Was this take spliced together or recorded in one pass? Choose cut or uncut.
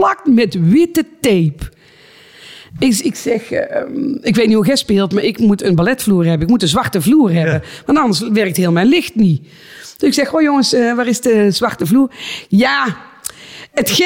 uncut